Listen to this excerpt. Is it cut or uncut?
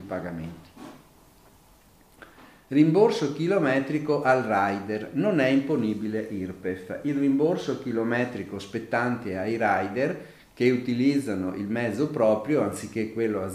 uncut